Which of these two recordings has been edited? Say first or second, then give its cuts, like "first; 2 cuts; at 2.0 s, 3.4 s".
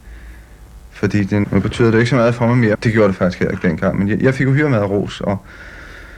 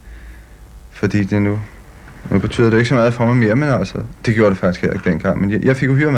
first; 2 cuts; at 1.4 s, 2.7 s